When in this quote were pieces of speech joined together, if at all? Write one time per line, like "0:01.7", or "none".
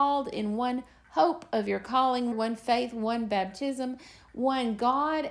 0:02.3